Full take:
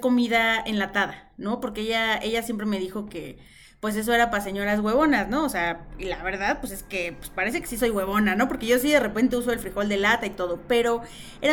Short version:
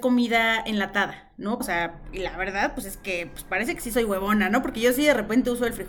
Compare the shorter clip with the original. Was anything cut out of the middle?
yes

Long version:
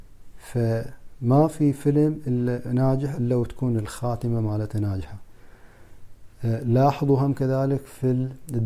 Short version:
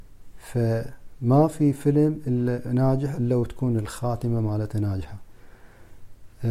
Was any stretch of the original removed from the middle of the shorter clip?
no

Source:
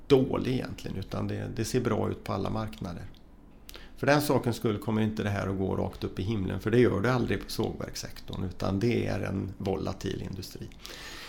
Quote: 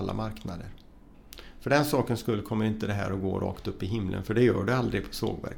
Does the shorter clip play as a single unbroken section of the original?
yes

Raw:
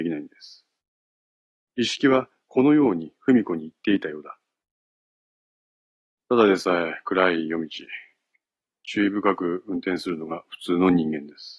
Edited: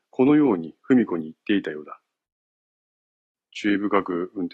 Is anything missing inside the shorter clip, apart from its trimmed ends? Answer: yes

